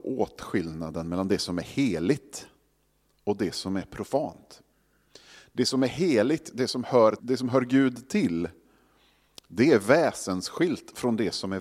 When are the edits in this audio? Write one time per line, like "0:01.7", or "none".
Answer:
0:07.2